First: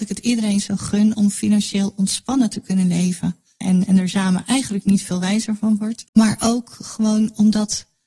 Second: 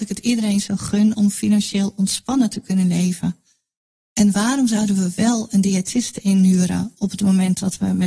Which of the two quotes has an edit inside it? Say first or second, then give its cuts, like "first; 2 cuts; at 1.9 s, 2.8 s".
first; 2 cuts; at 3.6 s, 6.1 s